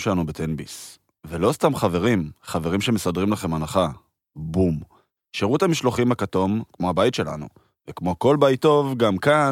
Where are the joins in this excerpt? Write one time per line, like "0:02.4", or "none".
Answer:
0:05.2
0:06.7